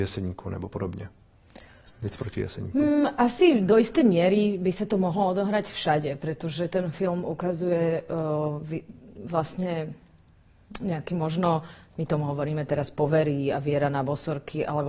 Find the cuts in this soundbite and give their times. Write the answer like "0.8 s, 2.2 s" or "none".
none